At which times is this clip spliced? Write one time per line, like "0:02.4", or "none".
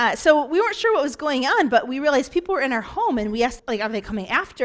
0:03.6